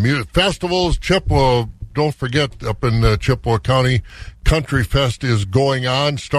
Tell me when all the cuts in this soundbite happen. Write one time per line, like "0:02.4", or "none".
none